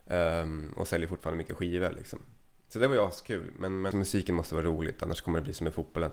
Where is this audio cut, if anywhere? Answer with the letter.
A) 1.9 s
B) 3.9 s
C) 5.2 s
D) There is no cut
B